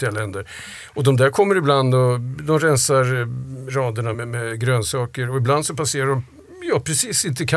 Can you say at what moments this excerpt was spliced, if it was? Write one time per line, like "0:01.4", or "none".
0:04.1